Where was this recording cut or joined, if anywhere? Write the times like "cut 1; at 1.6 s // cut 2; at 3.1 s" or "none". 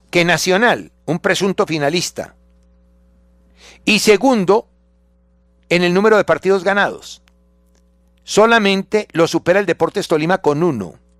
none